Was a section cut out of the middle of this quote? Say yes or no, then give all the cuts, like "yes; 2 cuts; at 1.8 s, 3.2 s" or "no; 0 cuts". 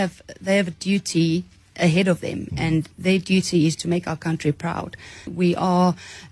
yes; 1 cut; at 5.3 s